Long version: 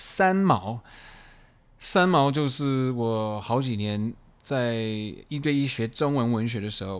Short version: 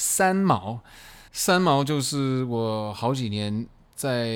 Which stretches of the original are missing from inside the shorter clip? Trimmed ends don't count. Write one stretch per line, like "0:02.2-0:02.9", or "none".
0:01.3-0:01.7